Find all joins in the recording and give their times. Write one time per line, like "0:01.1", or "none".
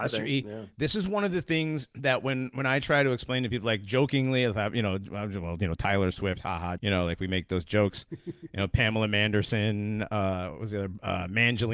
0:06.8